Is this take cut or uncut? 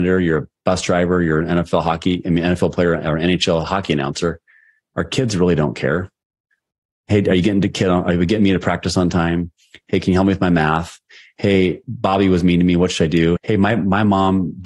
cut